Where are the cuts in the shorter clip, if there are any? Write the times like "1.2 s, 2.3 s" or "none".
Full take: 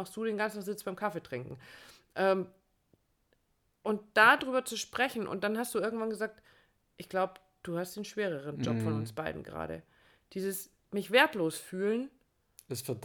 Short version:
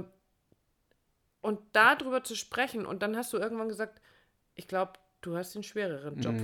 none